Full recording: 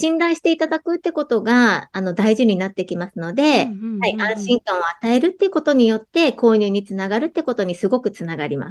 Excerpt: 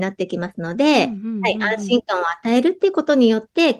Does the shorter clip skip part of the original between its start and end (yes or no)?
no